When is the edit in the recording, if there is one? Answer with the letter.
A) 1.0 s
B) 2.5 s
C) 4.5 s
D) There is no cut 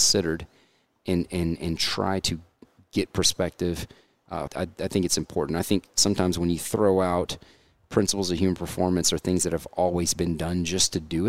C